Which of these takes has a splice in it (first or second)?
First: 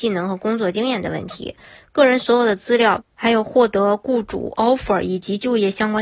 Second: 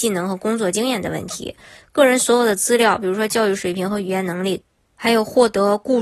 first